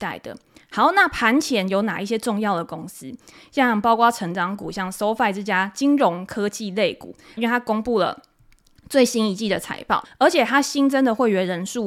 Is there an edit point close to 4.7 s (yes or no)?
no